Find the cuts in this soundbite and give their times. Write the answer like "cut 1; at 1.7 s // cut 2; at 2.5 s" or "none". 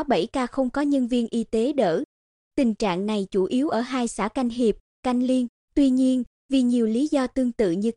cut 1; at 5.6 s